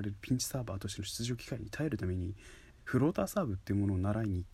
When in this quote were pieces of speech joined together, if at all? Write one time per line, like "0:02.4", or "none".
0:02.7

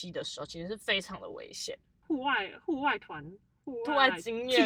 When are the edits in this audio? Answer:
0:02.0

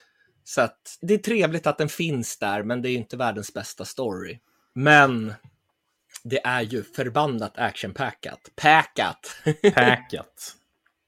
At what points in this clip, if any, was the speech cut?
0:01.0
0:04.7

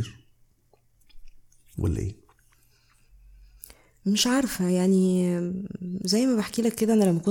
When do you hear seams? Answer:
none

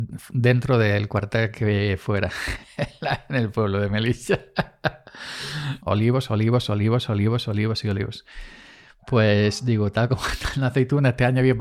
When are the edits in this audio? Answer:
0:05.8

